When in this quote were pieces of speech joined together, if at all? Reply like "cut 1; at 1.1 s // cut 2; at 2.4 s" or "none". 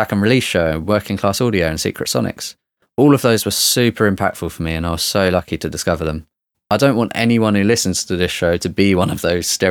cut 1; at 6.5 s